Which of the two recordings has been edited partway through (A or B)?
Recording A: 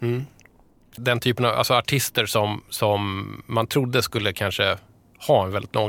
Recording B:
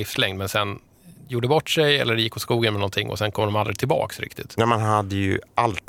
A